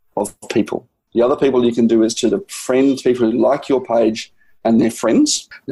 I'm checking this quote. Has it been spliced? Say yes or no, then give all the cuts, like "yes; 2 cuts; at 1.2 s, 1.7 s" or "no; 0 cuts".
yes; 1 cut; at 1.1 s